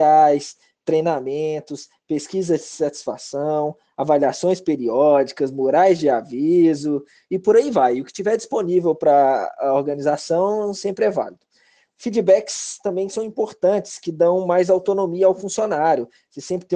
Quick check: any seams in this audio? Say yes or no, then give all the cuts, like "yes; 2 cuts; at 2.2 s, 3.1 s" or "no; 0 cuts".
no; 0 cuts